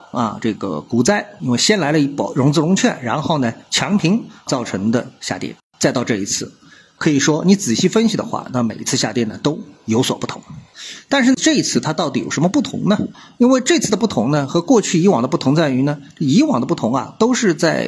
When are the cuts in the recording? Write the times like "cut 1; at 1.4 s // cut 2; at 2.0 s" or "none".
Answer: none